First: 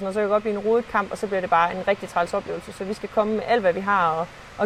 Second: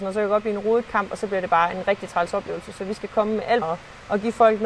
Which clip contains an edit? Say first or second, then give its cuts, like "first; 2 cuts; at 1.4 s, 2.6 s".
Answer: second; 1 cut; at 3.6 s